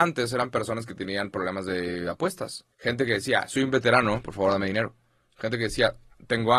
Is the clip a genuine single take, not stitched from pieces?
no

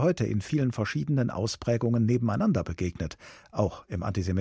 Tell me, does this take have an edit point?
no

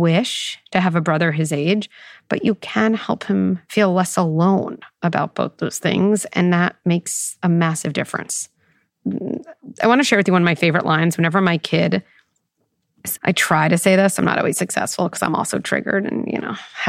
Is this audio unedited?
no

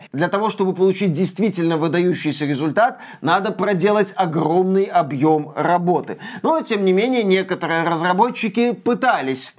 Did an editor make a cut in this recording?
no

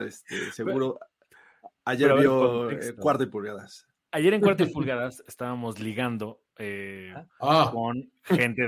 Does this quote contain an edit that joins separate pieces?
yes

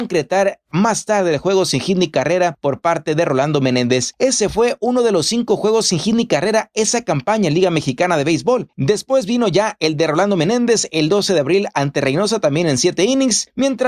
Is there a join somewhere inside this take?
yes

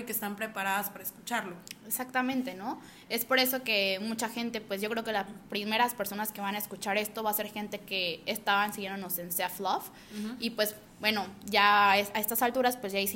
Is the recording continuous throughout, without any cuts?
yes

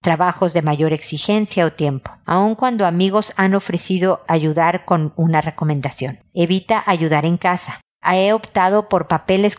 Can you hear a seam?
no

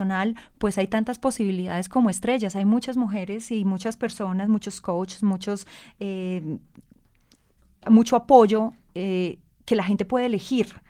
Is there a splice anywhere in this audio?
no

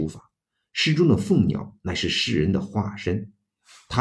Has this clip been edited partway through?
no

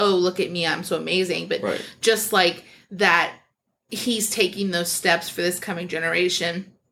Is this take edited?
no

